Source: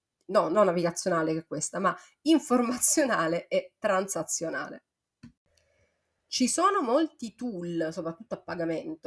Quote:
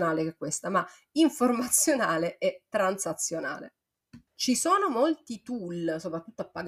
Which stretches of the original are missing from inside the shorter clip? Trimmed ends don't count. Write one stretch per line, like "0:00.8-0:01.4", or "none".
0:05.4-0:06.2